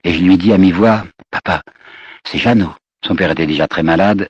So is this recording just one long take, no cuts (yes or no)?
no